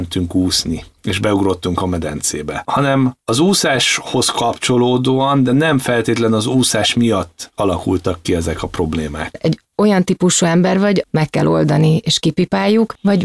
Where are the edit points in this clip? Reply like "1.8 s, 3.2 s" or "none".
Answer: 9.3 s, 11.0 s